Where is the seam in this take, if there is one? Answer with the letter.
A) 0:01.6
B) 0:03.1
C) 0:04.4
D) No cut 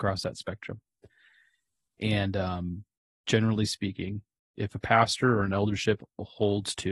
B